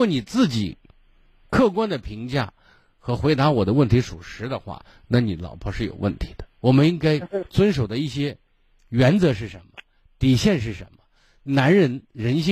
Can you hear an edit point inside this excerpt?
yes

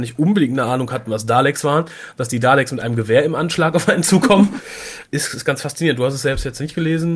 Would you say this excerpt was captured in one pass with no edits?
no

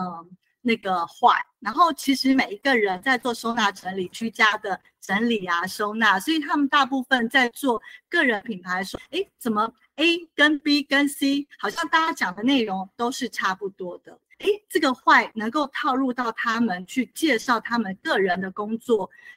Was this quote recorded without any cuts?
no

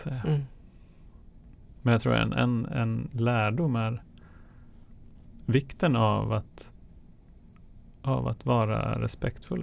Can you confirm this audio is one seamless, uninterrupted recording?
yes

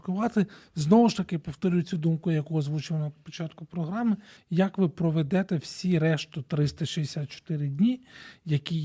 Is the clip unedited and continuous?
no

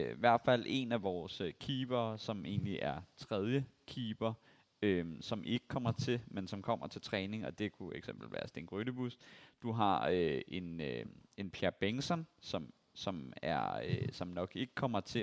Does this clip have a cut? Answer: no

